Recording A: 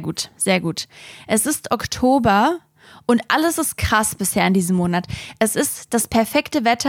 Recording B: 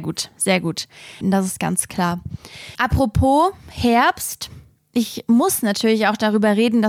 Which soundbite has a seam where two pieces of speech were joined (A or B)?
B